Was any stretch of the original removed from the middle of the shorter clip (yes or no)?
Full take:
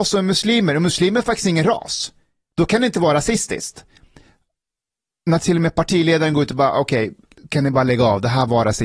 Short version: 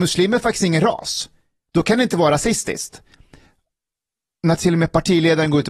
no